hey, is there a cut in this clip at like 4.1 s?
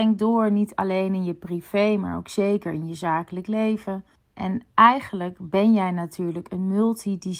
no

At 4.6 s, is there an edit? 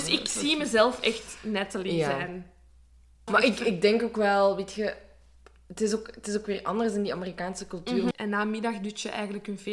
no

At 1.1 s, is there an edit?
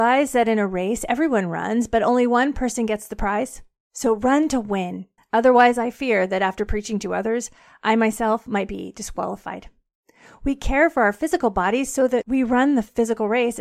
no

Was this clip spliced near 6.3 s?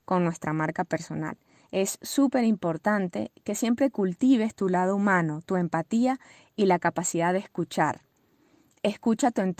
no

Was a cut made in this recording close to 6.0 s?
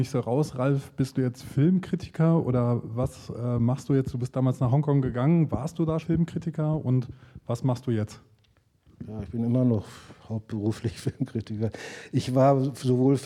yes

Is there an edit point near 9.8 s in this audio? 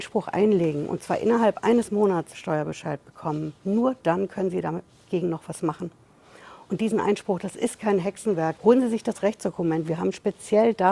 no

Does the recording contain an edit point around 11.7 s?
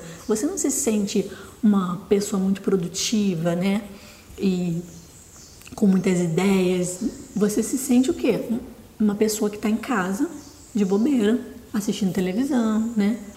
yes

